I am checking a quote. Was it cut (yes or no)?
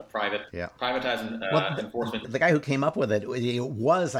yes